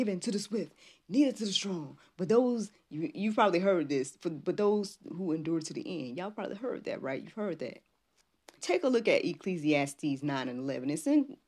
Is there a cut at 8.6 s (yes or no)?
yes